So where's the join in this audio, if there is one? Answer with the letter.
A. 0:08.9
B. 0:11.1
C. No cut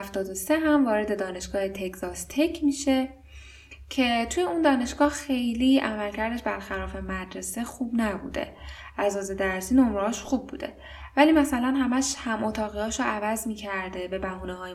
A